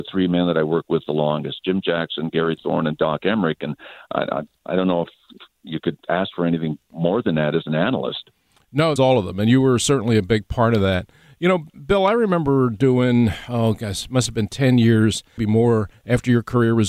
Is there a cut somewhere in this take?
yes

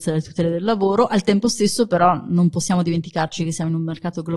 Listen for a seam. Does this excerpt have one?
no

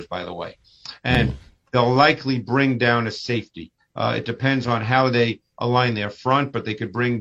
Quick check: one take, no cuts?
yes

